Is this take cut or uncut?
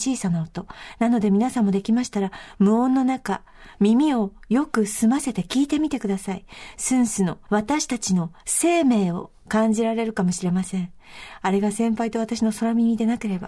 cut